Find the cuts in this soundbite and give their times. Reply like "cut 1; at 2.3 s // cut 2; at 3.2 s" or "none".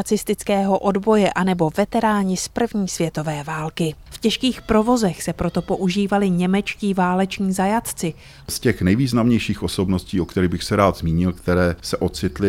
cut 1; at 4.1 s // cut 2; at 8.4 s